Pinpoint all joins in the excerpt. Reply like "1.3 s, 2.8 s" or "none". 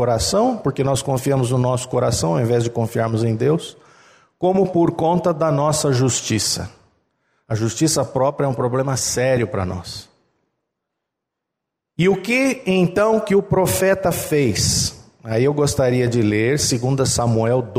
none